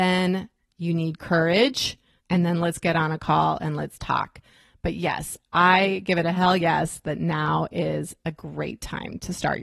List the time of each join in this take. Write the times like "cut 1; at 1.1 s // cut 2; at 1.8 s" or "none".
cut 1; at 2.2 s